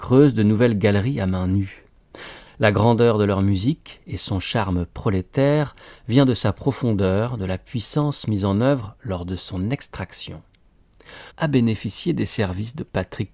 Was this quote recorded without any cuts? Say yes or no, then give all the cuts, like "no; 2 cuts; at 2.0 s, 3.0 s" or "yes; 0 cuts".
no; 2 cuts; at 2.5 s, 11.3 s